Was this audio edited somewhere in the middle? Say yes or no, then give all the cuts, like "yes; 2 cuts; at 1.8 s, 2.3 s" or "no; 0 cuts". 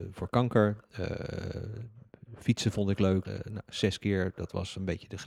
yes; 1 cut; at 3.2 s